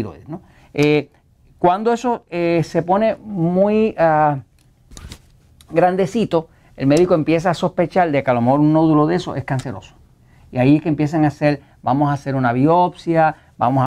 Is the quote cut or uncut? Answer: uncut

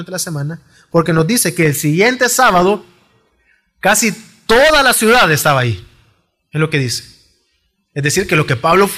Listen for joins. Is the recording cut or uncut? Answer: uncut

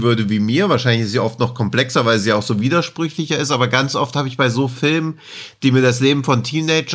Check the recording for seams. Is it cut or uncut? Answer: uncut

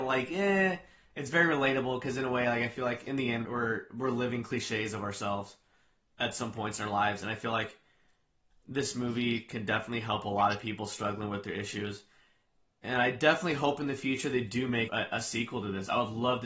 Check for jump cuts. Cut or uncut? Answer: cut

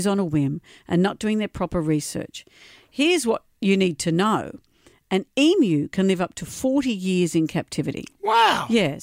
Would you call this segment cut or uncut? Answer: uncut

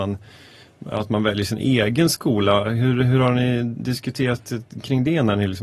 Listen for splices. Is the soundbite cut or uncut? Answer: uncut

